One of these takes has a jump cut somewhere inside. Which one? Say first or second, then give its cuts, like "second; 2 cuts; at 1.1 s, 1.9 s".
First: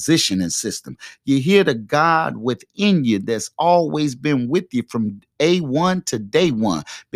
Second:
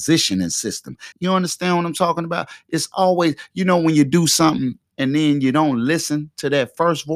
second; 1 cut; at 1.1 s